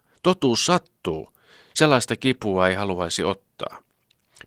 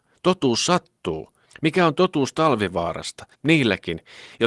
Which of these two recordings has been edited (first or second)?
second